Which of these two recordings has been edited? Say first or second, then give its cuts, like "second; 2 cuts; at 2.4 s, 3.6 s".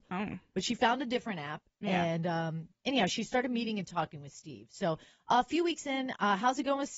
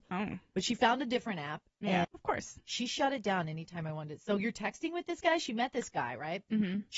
second; 1 cut; at 2.0 s